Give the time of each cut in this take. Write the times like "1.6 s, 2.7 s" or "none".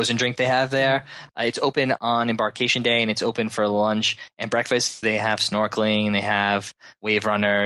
1.3 s, 5.0 s